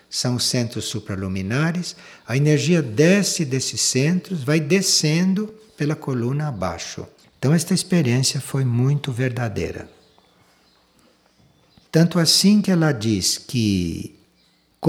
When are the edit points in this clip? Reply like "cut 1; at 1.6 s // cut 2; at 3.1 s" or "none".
cut 1; at 7.2 s

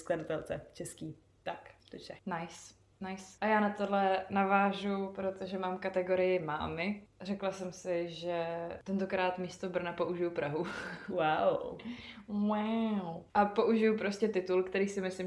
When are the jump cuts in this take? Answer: none

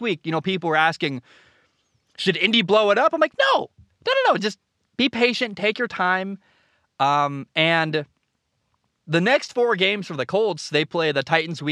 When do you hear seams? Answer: none

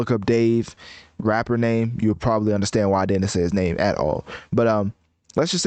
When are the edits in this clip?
none

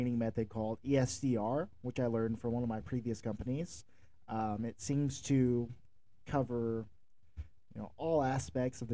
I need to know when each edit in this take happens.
none

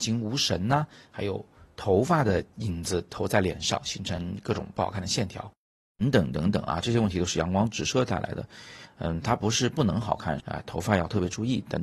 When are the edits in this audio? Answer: cut 1; at 8.9 s // cut 2; at 10.4 s

